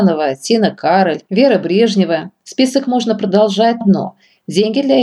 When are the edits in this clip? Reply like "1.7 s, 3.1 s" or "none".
3.8 s